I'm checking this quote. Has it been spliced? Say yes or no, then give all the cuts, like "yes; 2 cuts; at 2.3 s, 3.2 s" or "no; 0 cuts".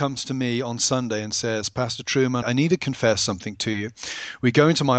yes; 1 cut; at 2.4 s